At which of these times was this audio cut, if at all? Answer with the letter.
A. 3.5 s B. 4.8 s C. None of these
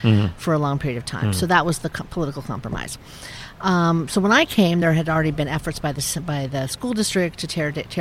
C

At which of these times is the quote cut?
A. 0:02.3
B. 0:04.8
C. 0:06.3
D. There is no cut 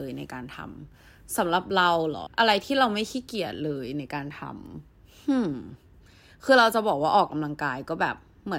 A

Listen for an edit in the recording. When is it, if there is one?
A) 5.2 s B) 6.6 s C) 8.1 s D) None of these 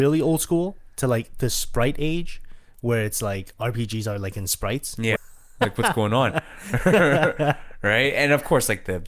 A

